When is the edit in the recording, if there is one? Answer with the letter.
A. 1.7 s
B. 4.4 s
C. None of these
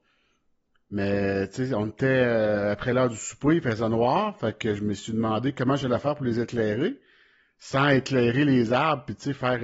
C